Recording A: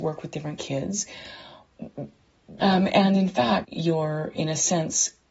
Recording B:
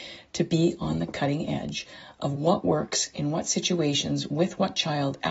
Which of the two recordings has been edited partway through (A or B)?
A